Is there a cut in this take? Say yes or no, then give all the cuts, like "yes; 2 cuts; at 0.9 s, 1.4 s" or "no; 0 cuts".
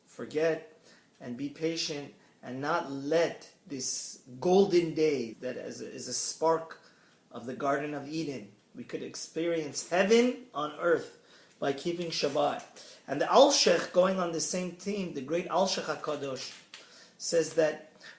yes; 1 cut; at 5.3 s